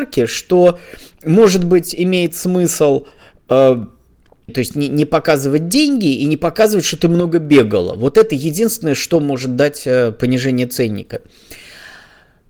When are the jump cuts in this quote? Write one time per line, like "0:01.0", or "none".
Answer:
0:04.5

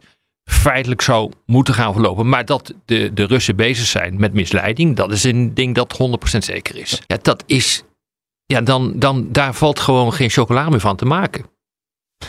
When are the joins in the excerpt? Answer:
0:07.1

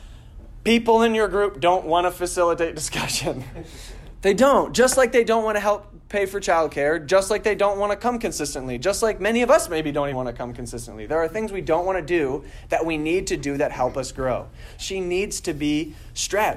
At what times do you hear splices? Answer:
0:10.1
0:14.8

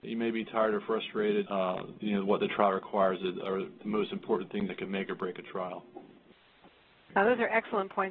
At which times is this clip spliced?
0:01.4
0:04.7

